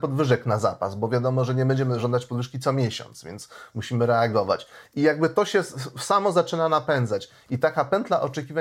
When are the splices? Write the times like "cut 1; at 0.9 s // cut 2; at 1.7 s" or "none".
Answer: none